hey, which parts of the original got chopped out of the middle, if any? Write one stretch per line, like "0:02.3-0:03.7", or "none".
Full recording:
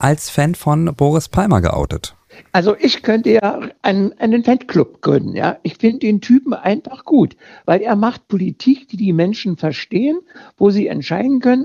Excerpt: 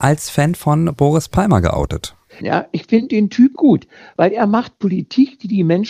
0:02.4-0:05.3
0:06.5-0:07.0

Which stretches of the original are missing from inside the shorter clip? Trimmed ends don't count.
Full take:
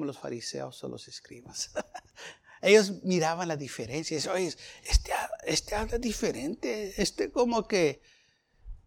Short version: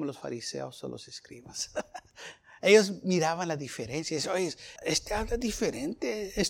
0:04.8-0:05.4

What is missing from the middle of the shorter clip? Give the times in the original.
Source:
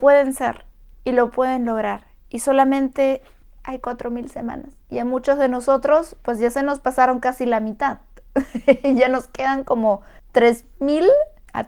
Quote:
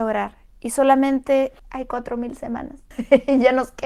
0:03.3-0:03.5
0:04.8-0:08.5

